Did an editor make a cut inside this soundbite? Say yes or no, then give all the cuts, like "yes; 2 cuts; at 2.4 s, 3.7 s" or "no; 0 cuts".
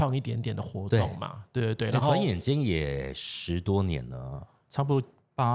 no; 0 cuts